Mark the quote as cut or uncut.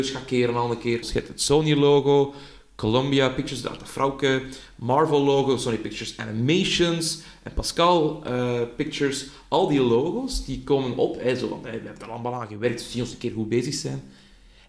cut